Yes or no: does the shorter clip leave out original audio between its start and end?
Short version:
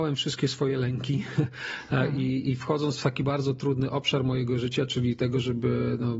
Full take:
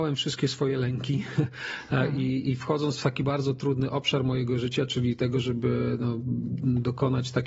no